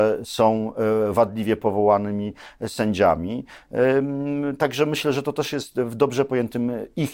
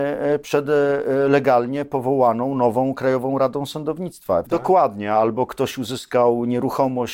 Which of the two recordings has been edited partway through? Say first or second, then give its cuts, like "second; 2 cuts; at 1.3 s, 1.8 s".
second; 1 cut; at 4.5 s